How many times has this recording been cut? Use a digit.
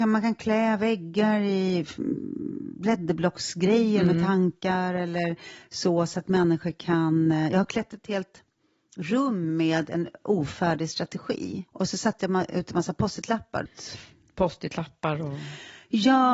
2